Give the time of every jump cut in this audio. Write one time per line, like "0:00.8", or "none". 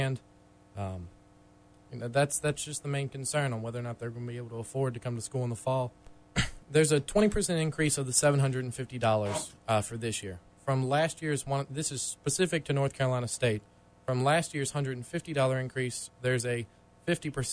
0:06.3